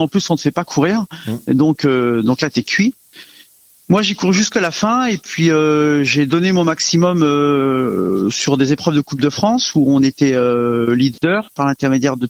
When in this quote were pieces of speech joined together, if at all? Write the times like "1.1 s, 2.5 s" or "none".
none